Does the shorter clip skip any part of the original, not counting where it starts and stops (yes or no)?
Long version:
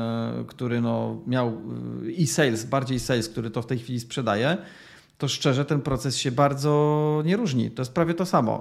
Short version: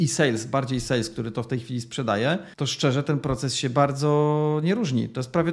yes